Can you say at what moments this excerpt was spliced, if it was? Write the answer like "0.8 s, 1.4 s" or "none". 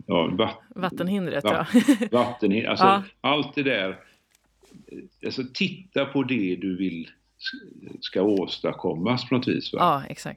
none